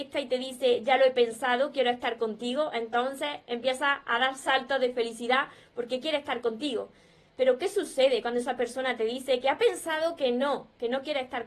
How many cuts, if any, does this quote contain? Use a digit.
0